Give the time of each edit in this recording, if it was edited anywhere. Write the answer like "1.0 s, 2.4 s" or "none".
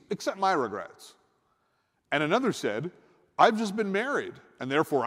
none